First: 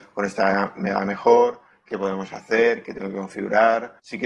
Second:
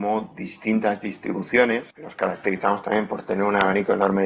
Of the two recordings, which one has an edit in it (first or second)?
second